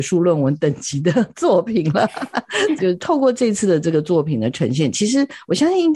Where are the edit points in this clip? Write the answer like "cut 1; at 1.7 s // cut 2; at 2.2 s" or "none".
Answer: cut 1; at 2.8 s